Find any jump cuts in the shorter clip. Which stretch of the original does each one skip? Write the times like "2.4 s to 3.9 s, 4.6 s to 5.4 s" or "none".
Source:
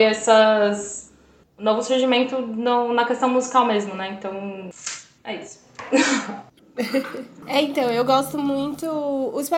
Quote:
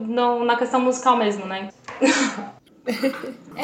4.2 s to 5.6 s